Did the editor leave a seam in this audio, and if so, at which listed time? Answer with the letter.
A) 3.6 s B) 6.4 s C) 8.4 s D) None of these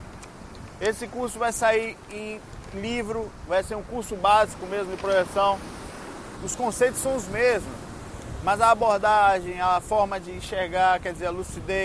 B